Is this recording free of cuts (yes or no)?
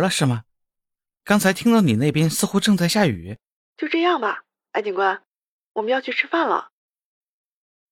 no